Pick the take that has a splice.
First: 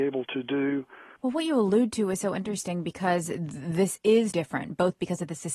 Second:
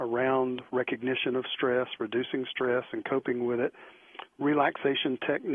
first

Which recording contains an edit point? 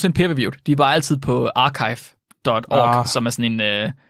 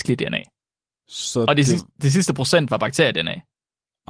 second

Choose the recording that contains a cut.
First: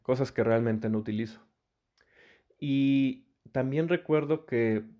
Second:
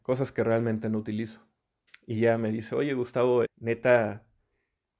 second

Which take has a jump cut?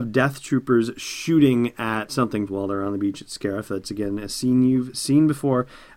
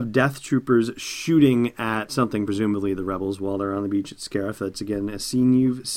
first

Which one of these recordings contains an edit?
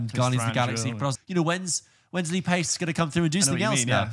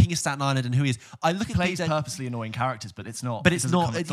first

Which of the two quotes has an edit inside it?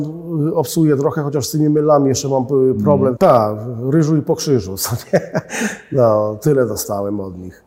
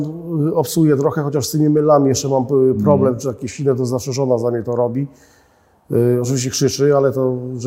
first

